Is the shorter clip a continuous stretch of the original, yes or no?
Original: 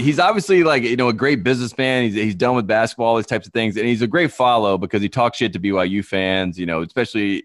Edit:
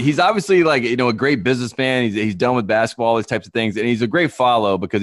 yes